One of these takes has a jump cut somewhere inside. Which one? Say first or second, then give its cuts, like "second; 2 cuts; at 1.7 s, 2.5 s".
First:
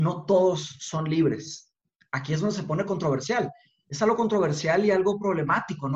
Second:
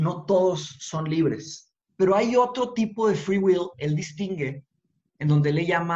second; 1 cut; at 1.8 s